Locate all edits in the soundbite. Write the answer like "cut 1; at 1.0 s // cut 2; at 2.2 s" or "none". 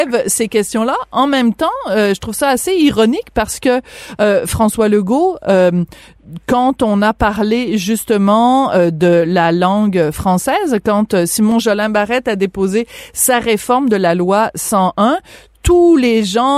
none